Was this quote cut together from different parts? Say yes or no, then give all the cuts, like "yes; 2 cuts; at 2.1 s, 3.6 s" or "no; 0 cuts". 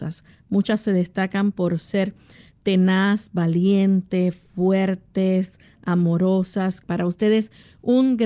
yes; 1 cut; at 6.8 s